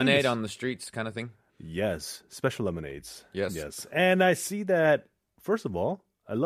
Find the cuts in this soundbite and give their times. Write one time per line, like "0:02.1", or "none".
none